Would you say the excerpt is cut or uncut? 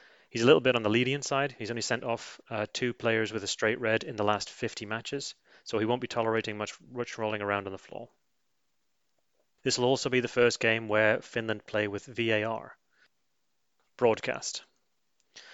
uncut